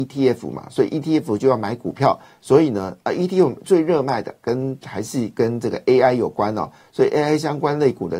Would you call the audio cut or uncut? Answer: uncut